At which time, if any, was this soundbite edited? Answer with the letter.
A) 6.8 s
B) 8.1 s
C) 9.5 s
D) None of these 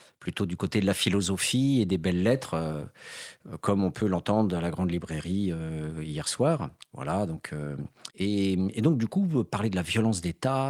B